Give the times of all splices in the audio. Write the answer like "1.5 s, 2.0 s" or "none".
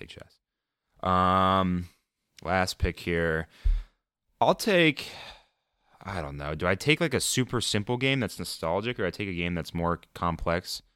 none